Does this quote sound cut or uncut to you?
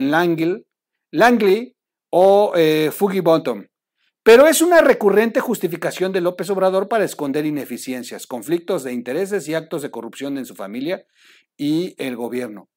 uncut